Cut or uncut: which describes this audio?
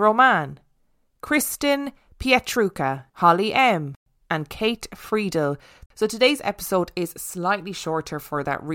cut